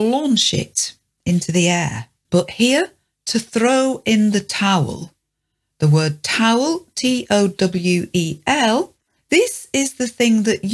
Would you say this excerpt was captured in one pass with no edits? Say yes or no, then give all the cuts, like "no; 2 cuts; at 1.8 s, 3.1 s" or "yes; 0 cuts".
no; 1 cut; at 2.2 s